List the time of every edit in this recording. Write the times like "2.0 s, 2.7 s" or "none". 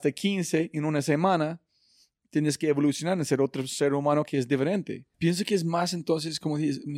5.1 s